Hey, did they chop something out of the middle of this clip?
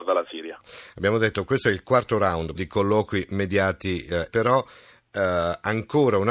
yes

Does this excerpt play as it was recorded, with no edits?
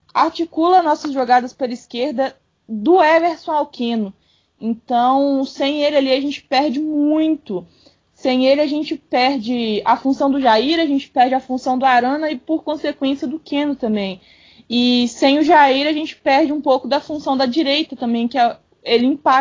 yes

